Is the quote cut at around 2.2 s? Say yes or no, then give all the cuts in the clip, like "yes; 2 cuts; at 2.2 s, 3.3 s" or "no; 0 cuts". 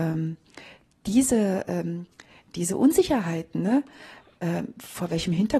no; 0 cuts